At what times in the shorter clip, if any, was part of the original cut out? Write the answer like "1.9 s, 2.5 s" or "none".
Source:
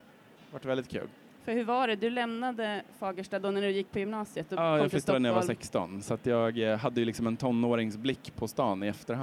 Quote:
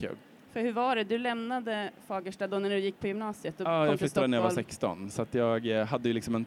none